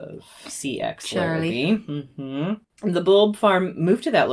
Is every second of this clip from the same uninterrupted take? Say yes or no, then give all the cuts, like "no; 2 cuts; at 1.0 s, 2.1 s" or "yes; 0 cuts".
yes; 0 cuts